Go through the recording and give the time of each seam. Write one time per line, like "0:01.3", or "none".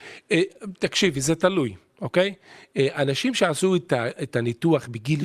none